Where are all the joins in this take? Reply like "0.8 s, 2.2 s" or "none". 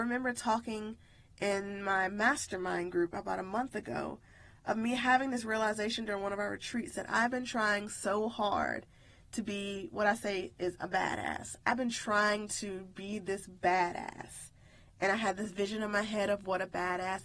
none

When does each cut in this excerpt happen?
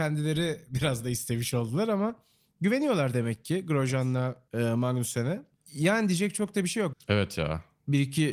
5.5 s, 6.9 s

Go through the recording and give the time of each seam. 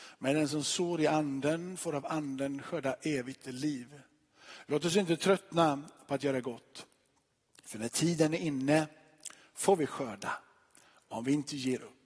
none

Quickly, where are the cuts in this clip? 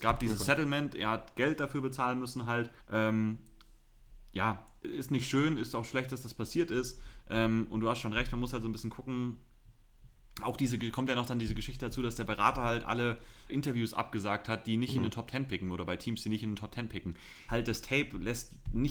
2.8 s, 13.5 s, 17.5 s

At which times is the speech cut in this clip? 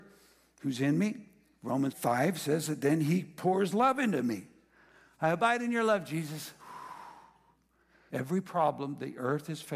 1.9 s, 8.1 s

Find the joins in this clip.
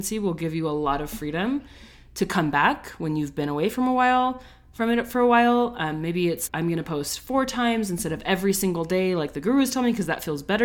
6.5 s

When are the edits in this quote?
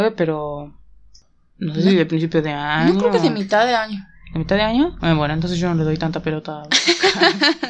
5.0 s

